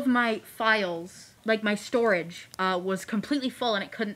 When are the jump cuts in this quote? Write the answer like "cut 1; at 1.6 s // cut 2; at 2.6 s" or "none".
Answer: cut 1; at 1.4 s